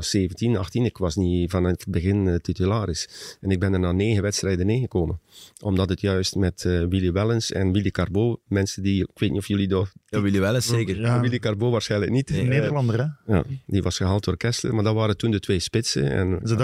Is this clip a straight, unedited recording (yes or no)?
yes